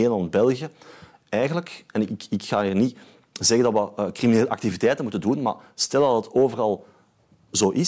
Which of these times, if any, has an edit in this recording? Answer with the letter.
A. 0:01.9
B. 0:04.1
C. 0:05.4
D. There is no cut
D